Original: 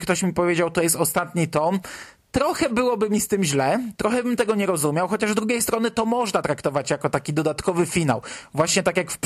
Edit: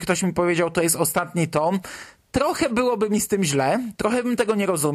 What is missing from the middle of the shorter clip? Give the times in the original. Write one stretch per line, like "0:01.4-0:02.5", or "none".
none